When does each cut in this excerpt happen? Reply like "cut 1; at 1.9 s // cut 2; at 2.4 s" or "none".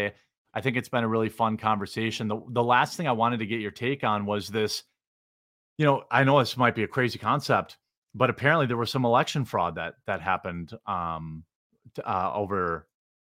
none

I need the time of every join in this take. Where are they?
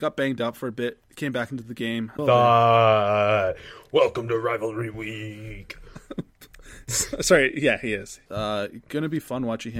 cut 1; at 2.2 s // cut 2; at 8.3 s

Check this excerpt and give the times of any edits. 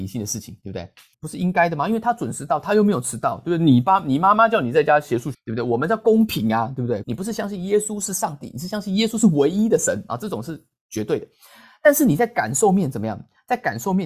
cut 1; at 1.1 s // cut 2; at 5.3 s // cut 3; at 7.0 s

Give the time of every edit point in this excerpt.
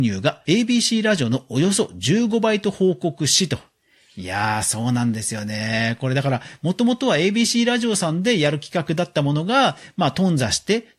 none

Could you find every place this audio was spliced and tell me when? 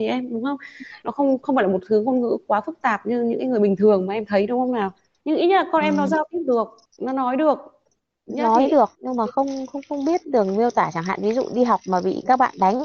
none

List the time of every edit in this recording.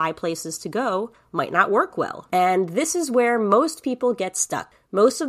cut 1; at 2.3 s

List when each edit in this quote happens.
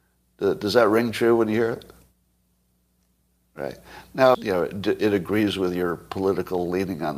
cut 1; at 4.3 s

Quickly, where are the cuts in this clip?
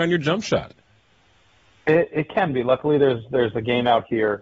none

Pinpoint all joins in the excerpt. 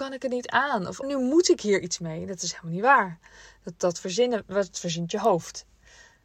cut 1; at 1.0 s

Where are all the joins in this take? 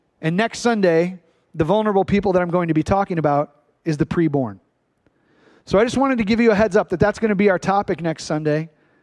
none

